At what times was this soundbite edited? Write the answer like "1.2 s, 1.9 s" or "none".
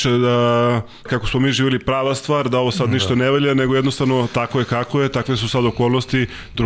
1.1 s